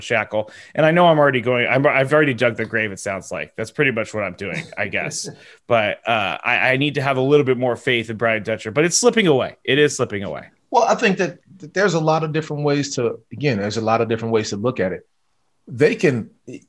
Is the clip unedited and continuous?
yes; 0 cuts

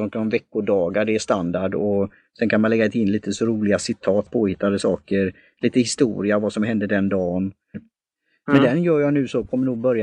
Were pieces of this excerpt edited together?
yes; 2 cuts; at 4.3 s, 7.7 s

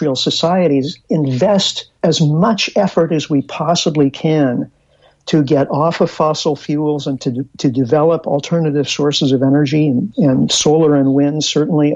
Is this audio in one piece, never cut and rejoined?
yes; 0 cuts

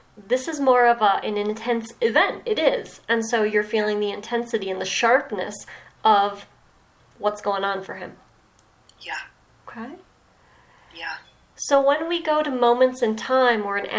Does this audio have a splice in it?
no; 0 cuts

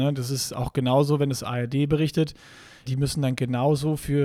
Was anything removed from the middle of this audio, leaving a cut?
yes; 1 cut; at 2.9 s

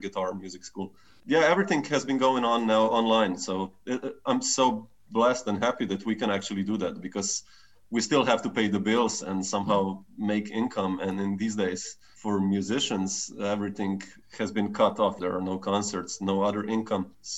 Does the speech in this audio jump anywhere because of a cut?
no; 0 cuts

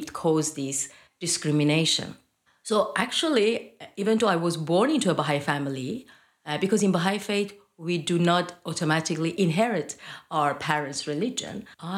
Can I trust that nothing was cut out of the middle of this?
yes; 0 cuts

